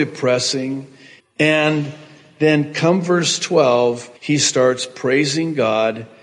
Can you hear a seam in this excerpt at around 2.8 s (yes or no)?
no